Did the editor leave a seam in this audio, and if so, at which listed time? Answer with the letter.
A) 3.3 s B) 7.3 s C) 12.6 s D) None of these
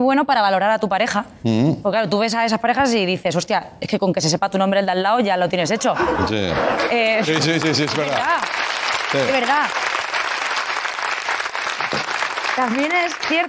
D